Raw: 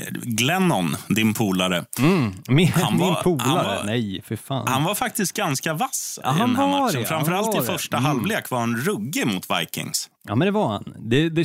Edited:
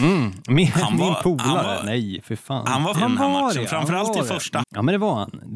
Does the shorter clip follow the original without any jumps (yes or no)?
no